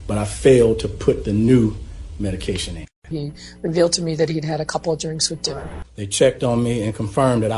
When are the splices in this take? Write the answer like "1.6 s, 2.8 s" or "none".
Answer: 3.0 s, 5.8 s

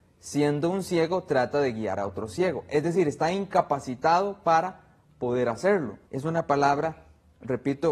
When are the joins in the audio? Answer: 6.1 s

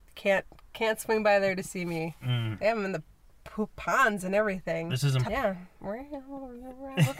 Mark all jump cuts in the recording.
2.6 s, 5.2 s

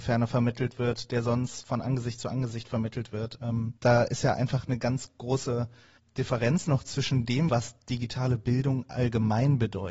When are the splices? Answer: 3.8 s, 7.5 s

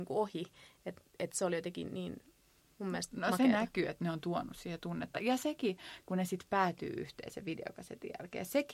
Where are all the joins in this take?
none

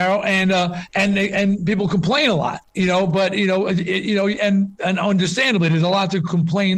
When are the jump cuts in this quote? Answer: 2.7 s

